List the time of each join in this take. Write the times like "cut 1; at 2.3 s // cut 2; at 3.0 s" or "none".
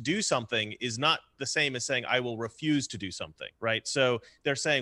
cut 1; at 3.6 s